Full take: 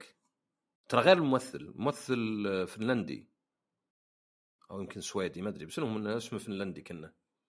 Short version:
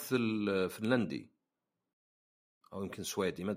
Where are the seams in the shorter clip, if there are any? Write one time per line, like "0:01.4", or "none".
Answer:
none